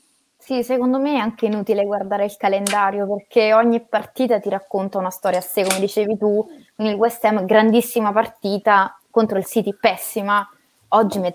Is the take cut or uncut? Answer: uncut